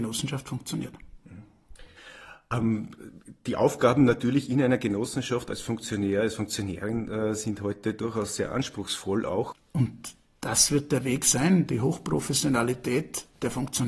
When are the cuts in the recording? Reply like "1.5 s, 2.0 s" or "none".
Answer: 9.5 s